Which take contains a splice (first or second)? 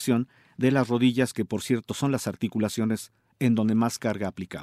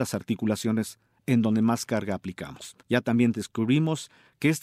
second